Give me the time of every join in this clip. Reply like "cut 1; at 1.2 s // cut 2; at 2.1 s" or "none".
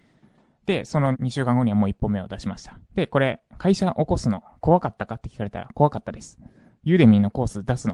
cut 1; at 1.1 s // cut 2; at 2.8 s